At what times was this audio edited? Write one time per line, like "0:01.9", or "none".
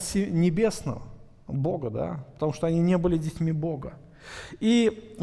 none